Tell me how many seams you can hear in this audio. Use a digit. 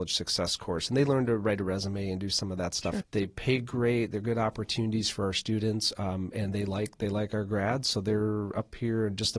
1